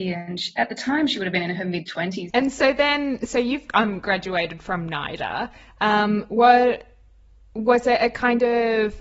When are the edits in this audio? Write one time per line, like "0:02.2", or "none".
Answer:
0:02.3

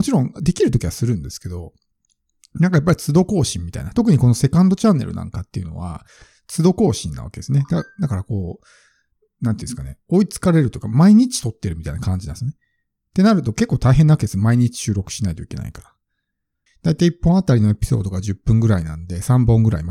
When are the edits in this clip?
0:16.7

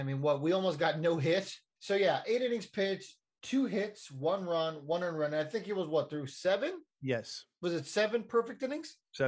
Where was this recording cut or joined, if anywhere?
0:01.8

